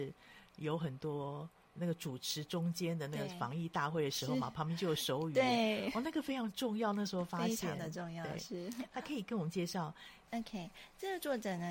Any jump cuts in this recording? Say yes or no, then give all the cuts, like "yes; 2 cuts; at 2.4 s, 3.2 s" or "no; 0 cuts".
yes; 1 cut; at 10.3 s